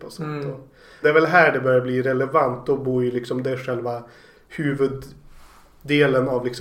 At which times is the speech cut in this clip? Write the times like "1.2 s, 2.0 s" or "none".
1.0 s